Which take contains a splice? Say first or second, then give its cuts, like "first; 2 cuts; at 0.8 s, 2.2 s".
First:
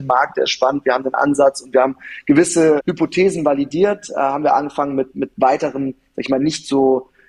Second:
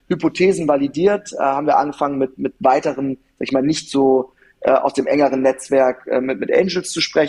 first; 1 cut; at 2.8 s